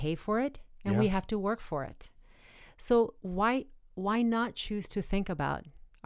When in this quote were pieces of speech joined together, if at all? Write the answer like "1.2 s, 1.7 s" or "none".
3.2 s